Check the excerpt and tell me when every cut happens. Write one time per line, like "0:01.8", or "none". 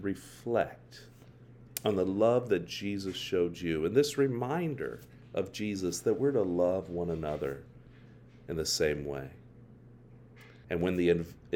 0:10.6